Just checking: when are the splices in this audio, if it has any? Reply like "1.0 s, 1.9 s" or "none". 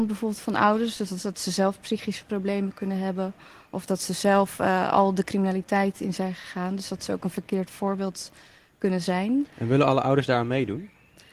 none